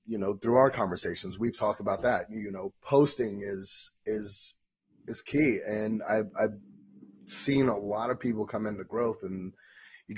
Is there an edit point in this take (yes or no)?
no